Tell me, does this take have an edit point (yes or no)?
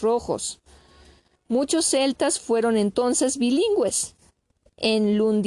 no